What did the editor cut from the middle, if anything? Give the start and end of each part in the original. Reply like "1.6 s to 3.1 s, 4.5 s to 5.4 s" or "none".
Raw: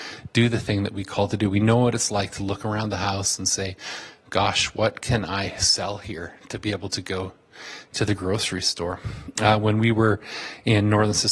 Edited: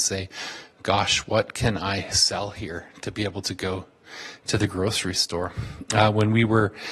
none